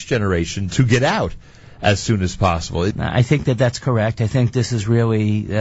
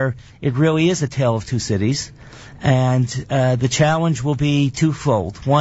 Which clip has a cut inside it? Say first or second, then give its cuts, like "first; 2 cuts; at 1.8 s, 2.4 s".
first; 1 cut; at 2.9 s